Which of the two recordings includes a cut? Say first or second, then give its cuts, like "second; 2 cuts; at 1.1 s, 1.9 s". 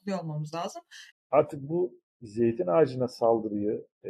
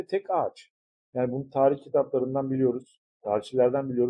first; 1 cut; at 1.1 s